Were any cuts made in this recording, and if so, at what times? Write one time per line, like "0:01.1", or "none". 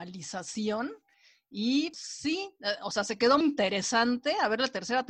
0:01.9
0:03.4

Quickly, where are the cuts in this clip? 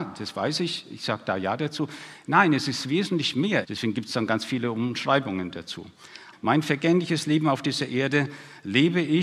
0:03.6
0:06.3

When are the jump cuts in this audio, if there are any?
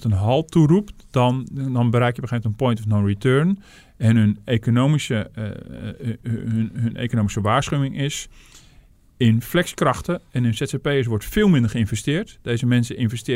none

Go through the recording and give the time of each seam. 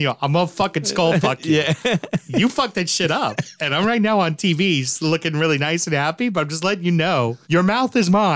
0:07.4

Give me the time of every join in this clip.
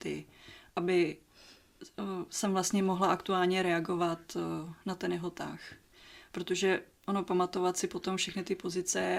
none

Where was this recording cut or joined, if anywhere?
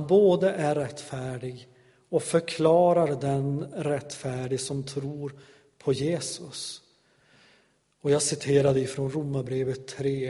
none

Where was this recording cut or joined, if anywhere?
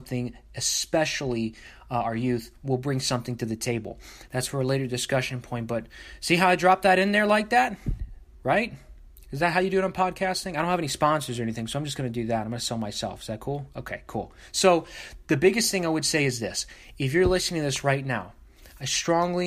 0:04.3

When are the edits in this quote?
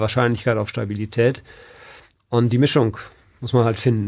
none

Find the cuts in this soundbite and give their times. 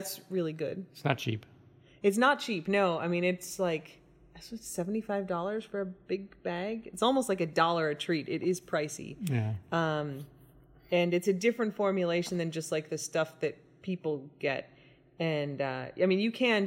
none

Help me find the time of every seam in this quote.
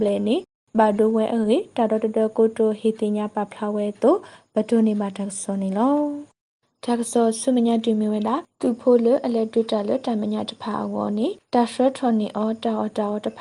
none

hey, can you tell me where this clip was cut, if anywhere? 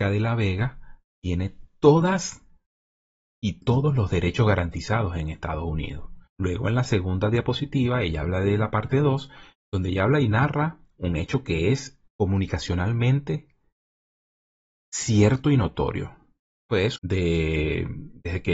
0:06.3
0:12.1
0:17.0

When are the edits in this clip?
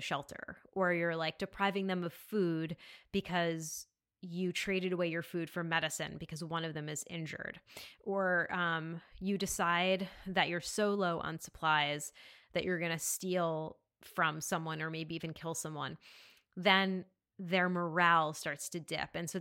none

